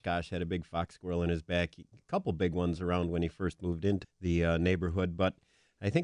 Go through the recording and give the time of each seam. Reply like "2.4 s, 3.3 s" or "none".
4.0 s